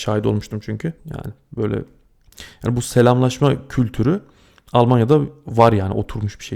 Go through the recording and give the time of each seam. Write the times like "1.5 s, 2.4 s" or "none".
1.0 s